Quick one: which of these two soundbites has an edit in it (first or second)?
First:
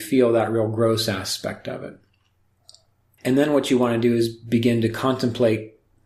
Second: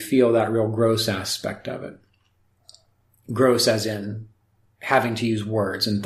first